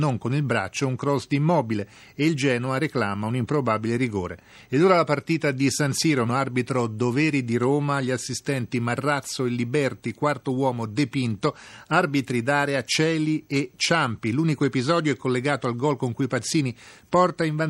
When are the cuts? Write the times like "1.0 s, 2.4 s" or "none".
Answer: 6.3 s